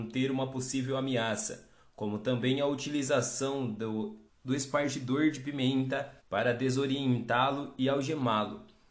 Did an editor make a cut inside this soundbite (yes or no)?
yes